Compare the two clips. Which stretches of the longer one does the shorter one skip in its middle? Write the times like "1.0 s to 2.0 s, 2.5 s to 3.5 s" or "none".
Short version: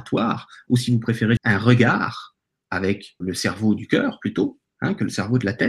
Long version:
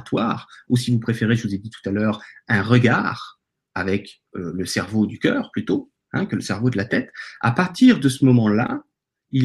1.4 s to 2.4 s, 4.2 s to 4.5 s